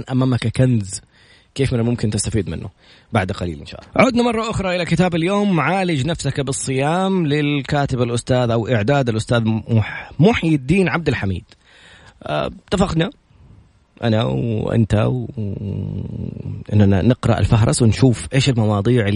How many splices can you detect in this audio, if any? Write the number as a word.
zero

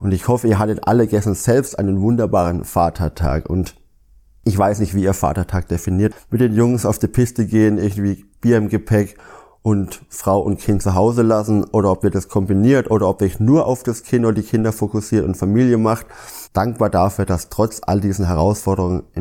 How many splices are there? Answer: two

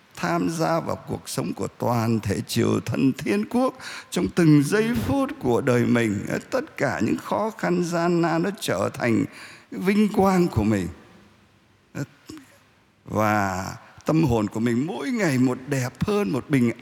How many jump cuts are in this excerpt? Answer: one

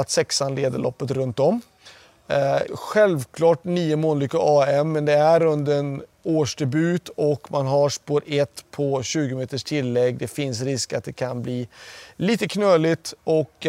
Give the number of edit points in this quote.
one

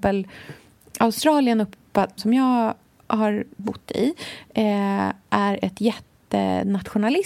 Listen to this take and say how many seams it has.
two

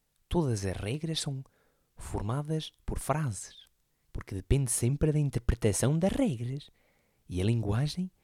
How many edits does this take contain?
one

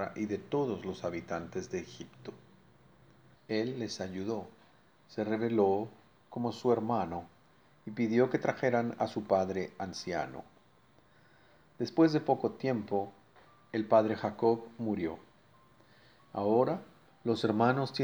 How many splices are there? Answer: two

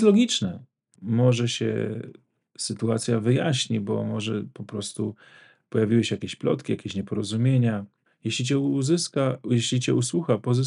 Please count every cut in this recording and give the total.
two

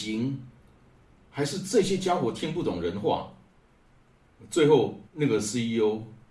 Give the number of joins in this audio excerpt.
one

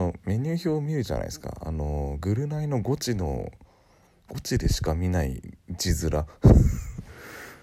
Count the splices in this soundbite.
zero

